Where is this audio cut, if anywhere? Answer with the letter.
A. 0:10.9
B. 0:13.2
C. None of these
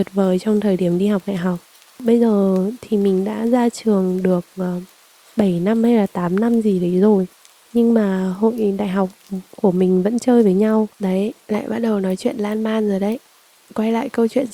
A